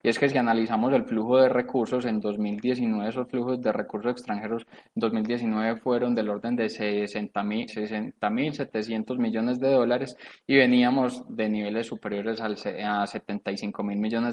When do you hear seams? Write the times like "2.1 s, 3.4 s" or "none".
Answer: 7.7 s